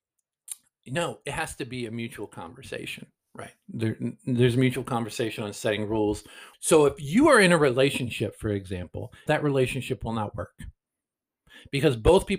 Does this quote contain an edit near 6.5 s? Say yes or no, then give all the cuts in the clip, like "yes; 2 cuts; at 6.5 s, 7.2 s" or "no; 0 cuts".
yes; 2 cuts; at 6.5 s, 9.3 s